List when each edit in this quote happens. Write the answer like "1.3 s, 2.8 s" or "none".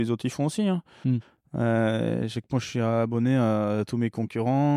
none